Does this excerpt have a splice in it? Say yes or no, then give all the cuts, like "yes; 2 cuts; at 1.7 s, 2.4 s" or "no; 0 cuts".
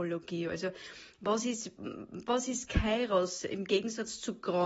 no; 0 cuts